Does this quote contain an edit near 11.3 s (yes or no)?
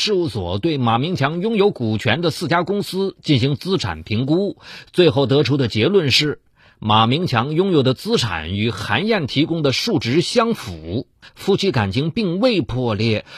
yes